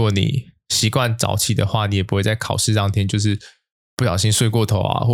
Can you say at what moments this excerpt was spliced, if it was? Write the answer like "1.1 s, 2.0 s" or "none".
none